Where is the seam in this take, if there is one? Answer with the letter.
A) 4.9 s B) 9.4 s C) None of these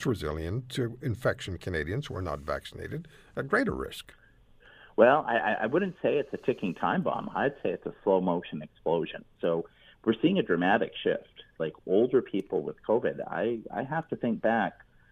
B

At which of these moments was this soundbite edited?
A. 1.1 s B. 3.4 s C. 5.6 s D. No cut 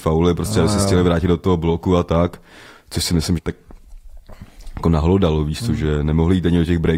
B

